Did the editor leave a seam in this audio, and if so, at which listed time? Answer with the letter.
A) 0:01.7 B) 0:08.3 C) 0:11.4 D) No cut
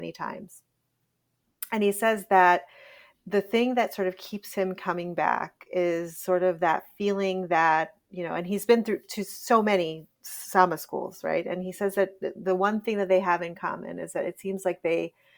D